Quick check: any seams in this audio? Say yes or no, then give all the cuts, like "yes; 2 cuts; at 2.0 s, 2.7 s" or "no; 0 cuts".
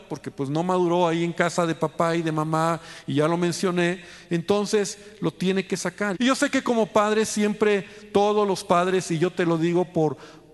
yes; 1 cut; at 6.1 s